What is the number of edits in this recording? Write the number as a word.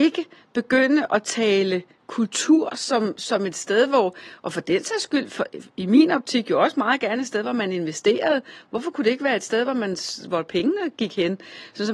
zero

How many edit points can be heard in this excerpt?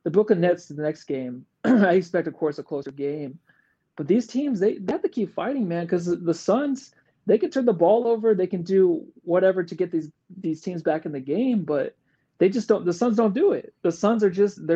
zero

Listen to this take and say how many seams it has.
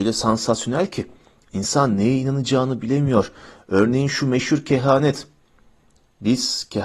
zero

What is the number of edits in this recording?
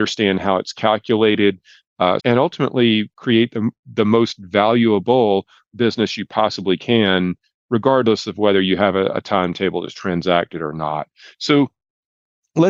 one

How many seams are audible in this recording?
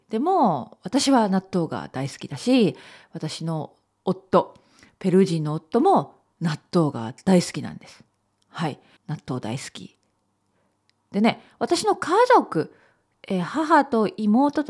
one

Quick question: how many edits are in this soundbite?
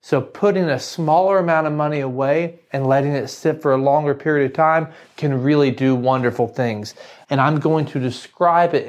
one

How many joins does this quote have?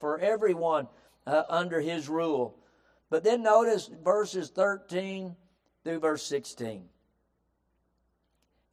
zero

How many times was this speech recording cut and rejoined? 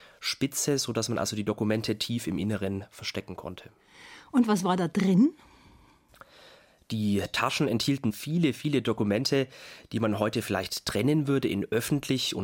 zero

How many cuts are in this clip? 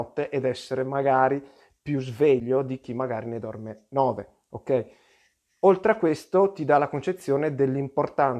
zero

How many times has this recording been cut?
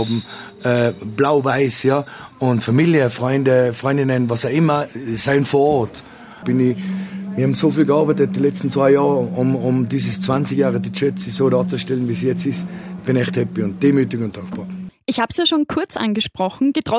one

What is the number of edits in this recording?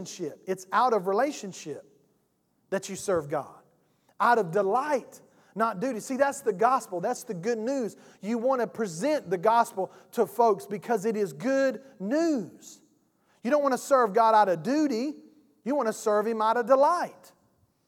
zero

